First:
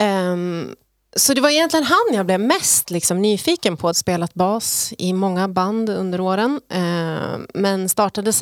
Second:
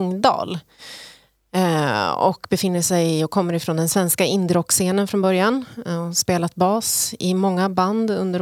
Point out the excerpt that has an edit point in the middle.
first; 1 cut; at 3.9 s

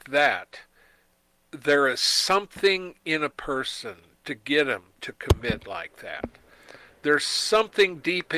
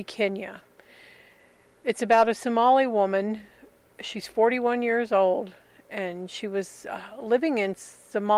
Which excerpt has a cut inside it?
first; 1 cut; at 1.5 s

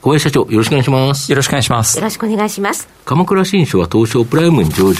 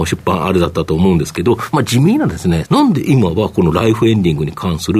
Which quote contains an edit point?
second; 1 cut; at 2.6 s

